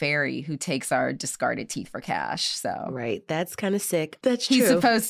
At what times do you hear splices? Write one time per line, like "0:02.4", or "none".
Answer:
0:04.2

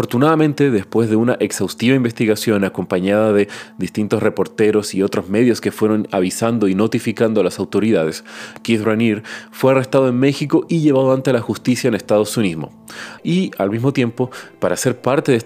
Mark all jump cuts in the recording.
0:08.6
0:13.2

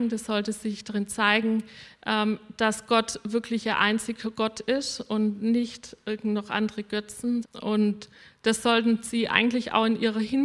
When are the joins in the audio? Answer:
0:07.4

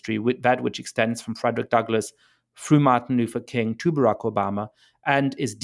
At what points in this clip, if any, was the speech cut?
none

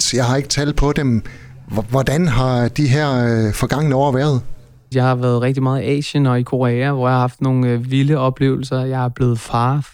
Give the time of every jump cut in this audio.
0:04.9

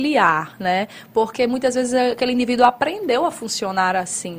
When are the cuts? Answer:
none

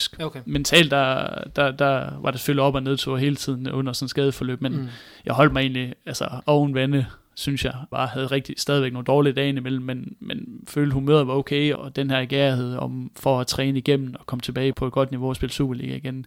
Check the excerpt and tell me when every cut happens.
0:07.9
0:11.8
0:14.7

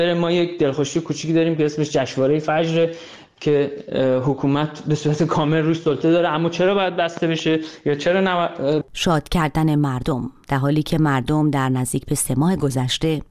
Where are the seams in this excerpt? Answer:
0:08.8

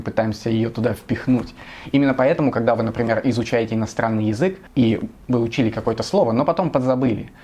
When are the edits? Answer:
none

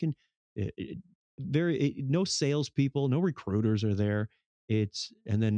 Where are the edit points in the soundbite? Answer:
none

